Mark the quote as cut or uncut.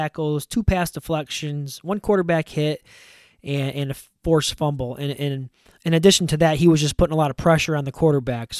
uncut